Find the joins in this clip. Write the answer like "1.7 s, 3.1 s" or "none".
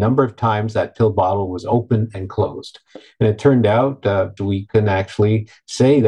4.4 s